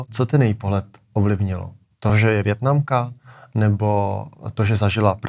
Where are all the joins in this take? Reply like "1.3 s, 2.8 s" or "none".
none